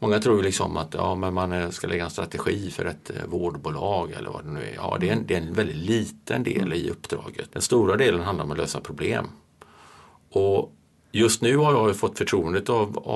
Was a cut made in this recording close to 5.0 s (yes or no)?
no